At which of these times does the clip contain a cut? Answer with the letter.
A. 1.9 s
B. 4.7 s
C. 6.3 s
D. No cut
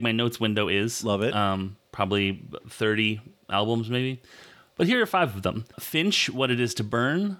A